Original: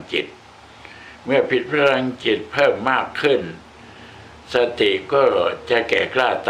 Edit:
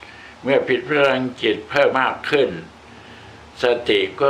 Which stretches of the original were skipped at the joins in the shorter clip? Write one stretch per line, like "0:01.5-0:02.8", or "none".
0:02.7-0:02.8